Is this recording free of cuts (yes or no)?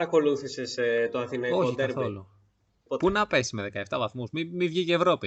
no